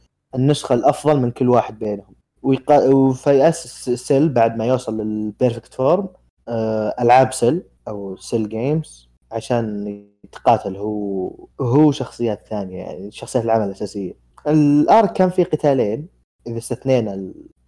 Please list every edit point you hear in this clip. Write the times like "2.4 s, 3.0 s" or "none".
none